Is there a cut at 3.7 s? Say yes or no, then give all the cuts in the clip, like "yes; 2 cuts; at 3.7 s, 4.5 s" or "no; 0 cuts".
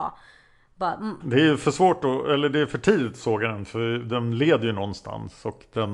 no; 1 cut; at 1.2 s